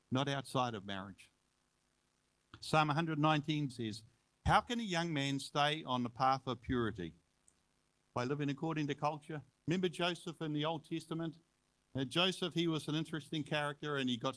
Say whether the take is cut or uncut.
cut